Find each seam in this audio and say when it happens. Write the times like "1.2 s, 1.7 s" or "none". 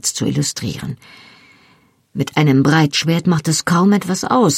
none

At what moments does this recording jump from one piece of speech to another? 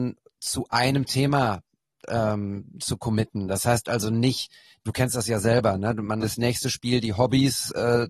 6.2 s

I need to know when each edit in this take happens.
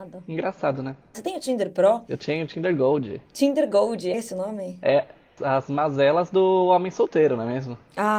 1.1 s, 4.1 s

